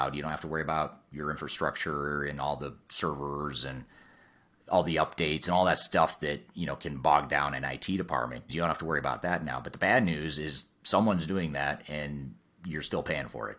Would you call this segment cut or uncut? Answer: cut